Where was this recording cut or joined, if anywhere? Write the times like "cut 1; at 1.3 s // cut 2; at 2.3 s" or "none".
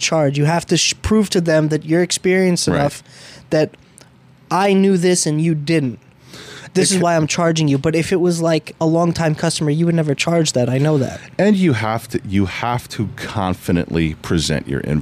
cut 1; at 8.8 s